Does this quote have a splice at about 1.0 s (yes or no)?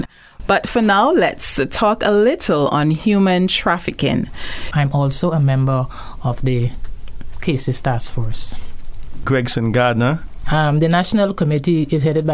no